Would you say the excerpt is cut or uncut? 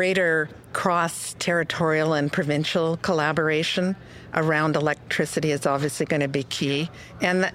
uncut